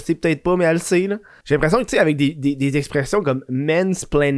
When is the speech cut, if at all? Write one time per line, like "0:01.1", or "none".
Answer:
0:01.4